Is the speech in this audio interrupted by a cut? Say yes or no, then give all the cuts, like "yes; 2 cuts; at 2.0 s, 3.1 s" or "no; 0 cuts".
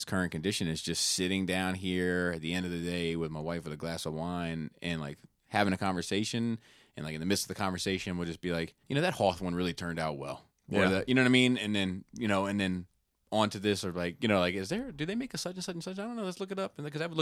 yes; 1 cut; at 8.8 s